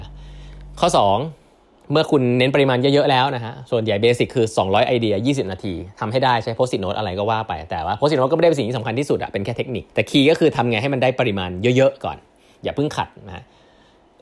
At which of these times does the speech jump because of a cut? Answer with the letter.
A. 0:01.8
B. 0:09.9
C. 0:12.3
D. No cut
B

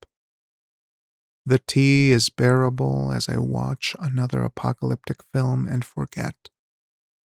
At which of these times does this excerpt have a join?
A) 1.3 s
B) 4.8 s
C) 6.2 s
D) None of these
D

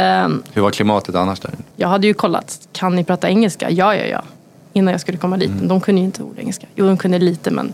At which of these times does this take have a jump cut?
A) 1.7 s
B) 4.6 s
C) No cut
A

